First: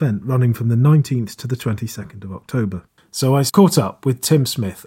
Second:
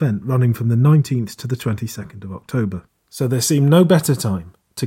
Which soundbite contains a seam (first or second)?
first